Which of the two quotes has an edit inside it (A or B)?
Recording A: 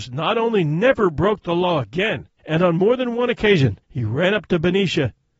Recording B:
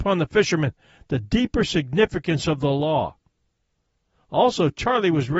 A